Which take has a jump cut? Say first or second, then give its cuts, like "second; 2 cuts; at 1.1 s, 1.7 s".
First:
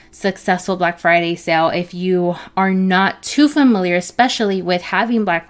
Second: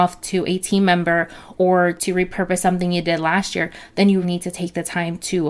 second; 1 cut; at 4.2 s